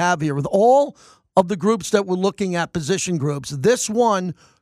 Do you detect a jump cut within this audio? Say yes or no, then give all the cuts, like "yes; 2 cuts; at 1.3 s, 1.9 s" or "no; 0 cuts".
no; 0 cuts